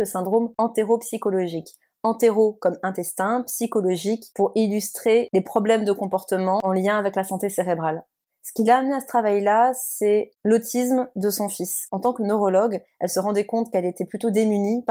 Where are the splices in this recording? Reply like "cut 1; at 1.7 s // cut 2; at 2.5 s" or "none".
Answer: none